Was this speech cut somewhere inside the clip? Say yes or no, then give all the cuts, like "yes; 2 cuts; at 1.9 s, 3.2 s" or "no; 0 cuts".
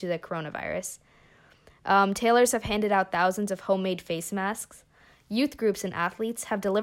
no; 0 cuts